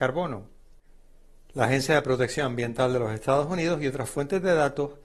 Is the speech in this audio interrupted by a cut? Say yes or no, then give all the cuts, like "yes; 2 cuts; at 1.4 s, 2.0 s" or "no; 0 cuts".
no; 0 cuts